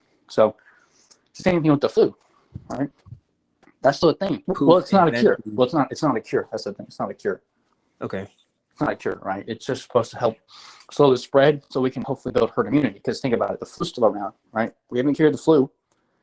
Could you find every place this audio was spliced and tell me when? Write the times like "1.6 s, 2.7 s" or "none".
4.5 s